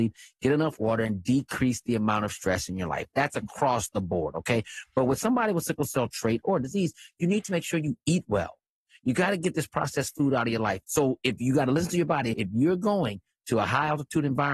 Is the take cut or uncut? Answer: cut